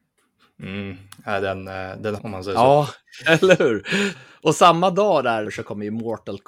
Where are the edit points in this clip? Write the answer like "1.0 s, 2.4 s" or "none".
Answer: 2.2 s, 4.1 s, 5.4 s